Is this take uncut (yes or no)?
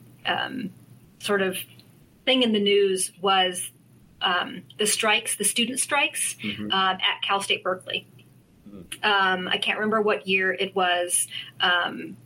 yes